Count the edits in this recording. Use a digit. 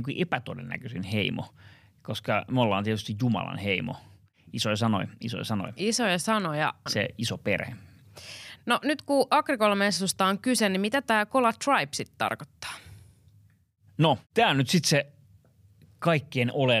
1